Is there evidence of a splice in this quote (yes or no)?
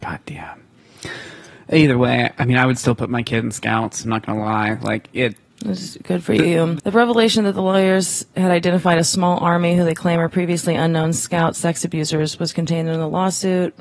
yes